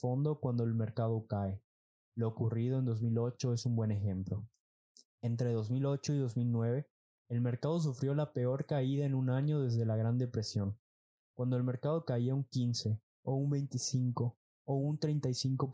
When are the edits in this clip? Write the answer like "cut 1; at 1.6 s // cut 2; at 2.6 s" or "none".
cut 1; at 11.2 s